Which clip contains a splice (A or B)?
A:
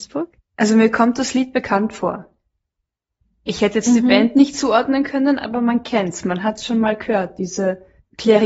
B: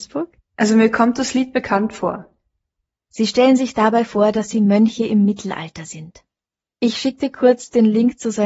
B